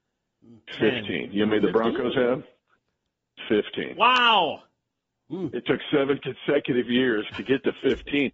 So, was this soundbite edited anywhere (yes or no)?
no